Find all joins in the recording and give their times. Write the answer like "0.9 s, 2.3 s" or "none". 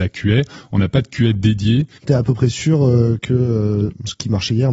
2.0 s